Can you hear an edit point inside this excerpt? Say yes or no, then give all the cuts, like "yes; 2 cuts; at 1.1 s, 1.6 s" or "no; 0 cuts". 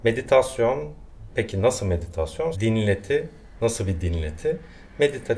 yes; 1 cut; at 2.5 s